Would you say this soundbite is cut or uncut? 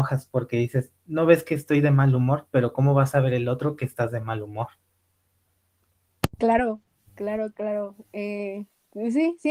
uncut